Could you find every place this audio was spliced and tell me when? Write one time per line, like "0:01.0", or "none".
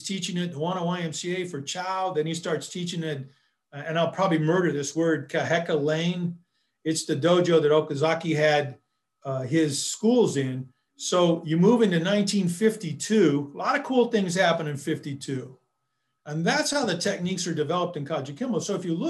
0:10.9
0:16.2